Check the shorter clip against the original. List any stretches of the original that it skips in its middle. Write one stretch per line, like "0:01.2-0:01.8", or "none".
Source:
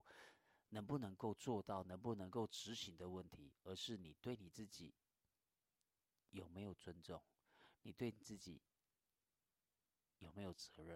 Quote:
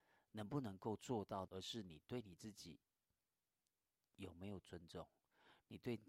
0:01.8-0:03.6